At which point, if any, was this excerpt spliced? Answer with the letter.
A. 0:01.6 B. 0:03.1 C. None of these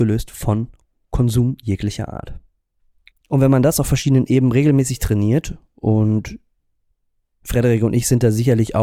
B